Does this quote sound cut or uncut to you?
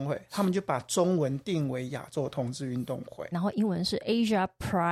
cut